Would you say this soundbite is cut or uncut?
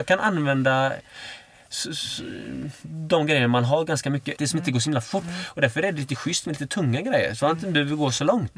cut